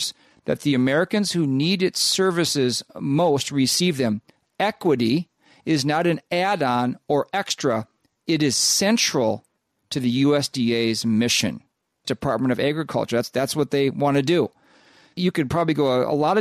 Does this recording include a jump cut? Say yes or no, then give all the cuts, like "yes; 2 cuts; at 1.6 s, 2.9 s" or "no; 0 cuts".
yes; 1 cut; at 12.0 s